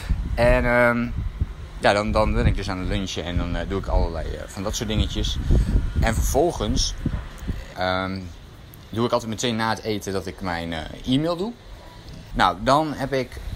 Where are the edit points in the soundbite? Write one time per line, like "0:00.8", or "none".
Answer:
0:07.7
0:12.3